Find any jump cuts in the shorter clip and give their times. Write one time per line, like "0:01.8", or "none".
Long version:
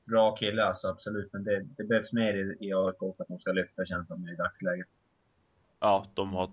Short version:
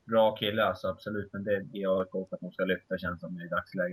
0:01.7